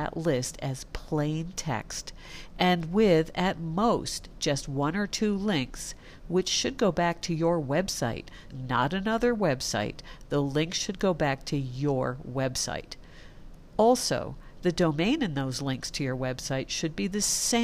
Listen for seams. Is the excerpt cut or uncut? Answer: cut